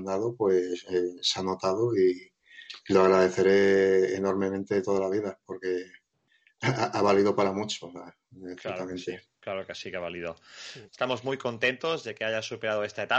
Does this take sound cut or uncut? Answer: cut